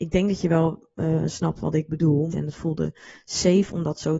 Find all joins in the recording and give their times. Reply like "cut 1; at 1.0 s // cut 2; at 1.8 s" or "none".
cut 1; at 2.3 s

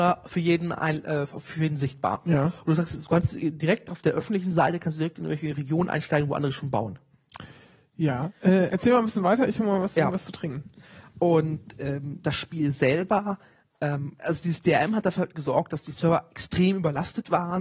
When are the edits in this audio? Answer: none

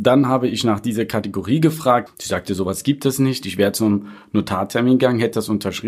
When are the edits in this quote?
cut 1; at 2.1 s // cut 2; at 3.4 s

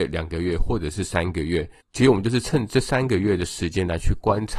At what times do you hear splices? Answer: none

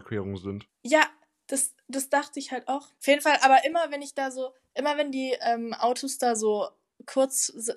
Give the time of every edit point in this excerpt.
none

